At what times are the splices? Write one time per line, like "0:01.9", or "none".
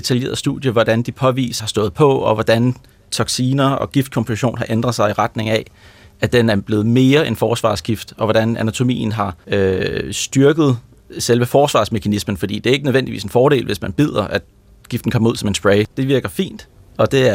0:01.6
0:15.9